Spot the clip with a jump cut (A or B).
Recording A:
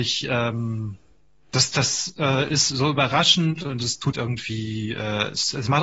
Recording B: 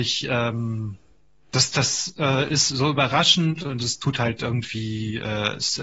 A